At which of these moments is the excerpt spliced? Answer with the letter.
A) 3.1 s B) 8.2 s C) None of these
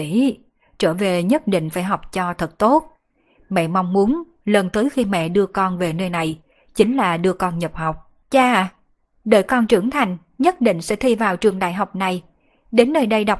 B